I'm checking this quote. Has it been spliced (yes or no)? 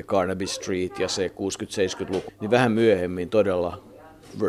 yes